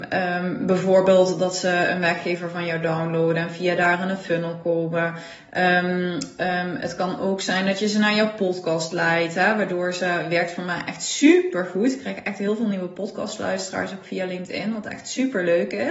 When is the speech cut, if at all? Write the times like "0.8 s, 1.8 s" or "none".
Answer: none